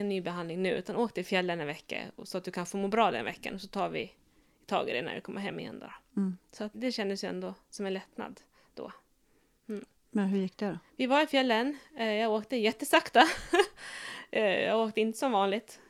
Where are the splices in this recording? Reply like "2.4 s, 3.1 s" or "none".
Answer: 6.7 s